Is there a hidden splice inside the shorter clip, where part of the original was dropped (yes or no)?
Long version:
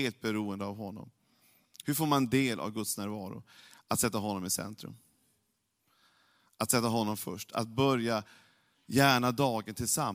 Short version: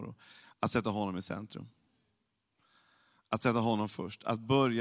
no